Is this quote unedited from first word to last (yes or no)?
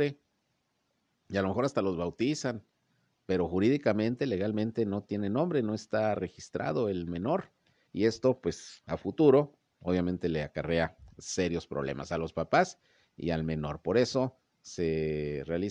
yes